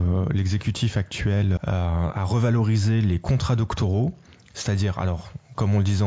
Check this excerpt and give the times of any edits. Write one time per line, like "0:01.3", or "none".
0:01.6